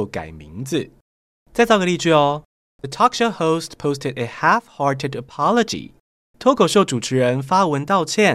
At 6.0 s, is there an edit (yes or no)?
no